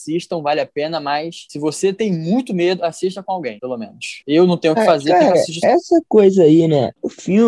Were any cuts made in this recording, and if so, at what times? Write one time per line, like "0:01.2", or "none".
0:05.6